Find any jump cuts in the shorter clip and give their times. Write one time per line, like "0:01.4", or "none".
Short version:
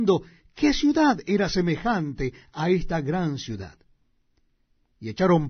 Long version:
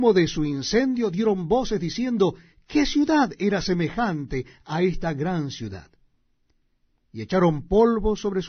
none